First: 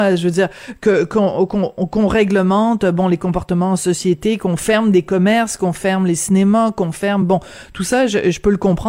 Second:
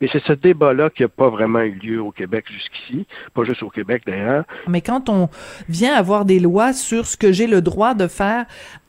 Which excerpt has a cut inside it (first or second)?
second